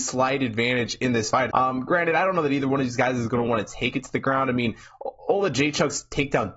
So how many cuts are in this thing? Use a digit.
1